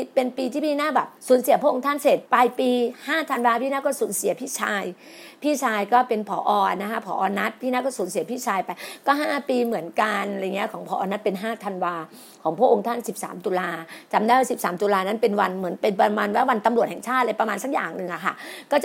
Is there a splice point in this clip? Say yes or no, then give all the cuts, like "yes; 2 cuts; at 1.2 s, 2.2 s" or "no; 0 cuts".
yes; 2 cuts; at 1.2 s, 2.3 s